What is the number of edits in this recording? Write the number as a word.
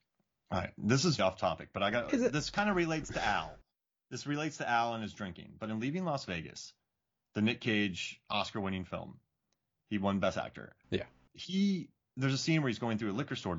one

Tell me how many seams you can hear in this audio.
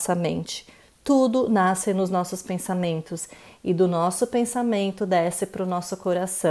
zero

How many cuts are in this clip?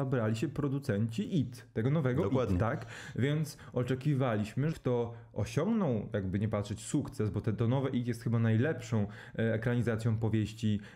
one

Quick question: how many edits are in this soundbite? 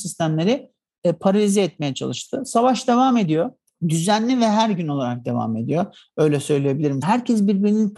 one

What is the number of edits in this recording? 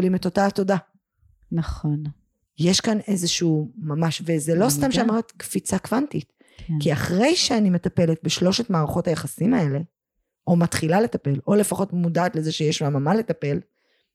zero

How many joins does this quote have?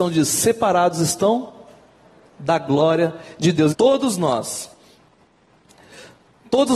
one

